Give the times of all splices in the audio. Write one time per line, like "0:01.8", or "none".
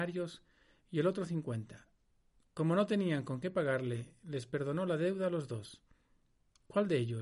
none